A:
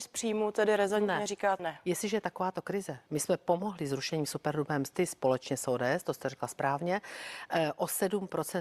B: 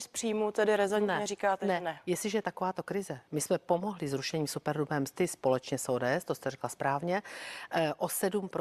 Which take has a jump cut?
A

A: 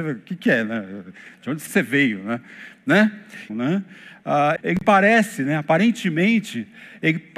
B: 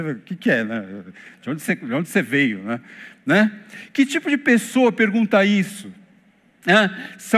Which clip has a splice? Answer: A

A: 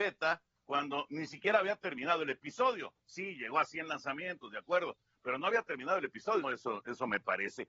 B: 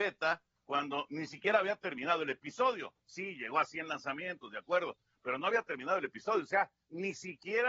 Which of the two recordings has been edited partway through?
A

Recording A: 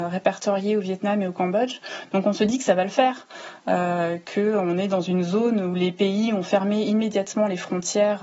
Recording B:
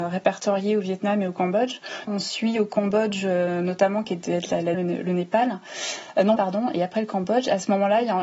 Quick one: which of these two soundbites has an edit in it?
B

